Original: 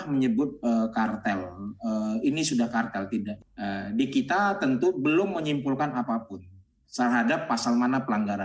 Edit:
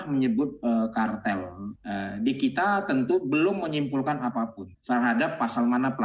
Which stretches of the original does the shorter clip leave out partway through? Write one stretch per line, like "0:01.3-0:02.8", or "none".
0:01.8-0:03.5
0:06.5-0:06.8